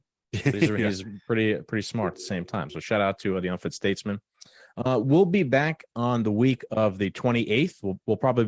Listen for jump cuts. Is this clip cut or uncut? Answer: uncut